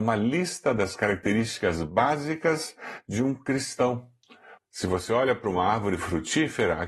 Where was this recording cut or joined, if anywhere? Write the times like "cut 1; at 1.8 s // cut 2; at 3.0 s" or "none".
cut 1; at 4.6 s